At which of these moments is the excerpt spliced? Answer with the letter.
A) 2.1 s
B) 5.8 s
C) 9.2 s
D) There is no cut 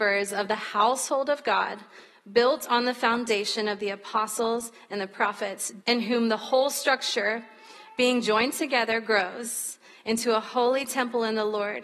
B